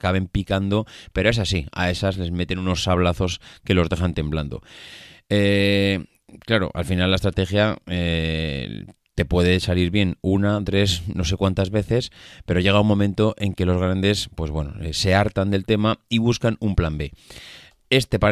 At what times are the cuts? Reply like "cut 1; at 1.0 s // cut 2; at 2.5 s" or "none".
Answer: cut 1; at 10.6 s